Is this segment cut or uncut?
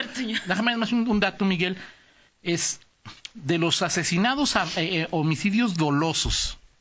uncut